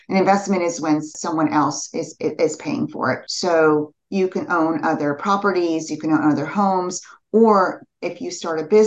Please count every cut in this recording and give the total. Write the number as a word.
zero